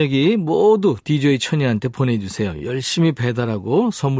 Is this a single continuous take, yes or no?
yes